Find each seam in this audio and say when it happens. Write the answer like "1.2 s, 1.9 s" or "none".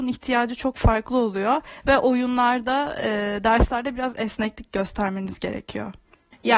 none

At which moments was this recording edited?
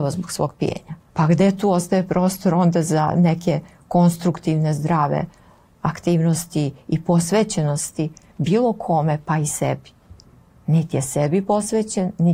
1.1 s

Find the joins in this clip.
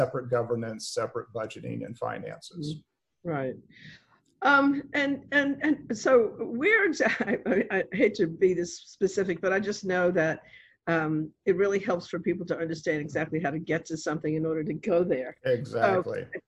none

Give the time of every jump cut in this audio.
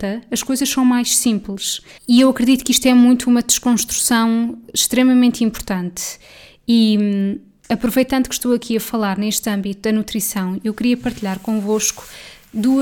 2.0 s

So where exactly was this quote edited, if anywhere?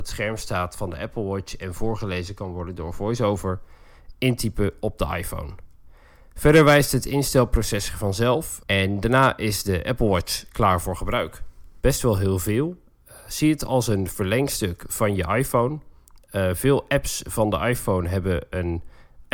8.6 s, 11.8 s

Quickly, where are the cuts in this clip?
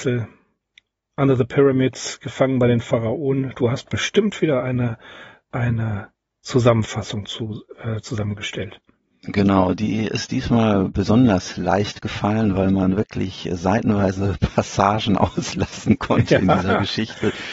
none

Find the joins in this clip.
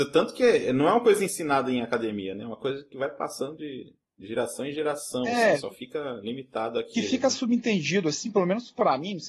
none

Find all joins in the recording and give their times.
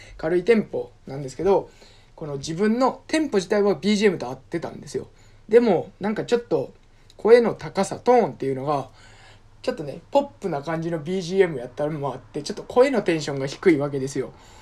none

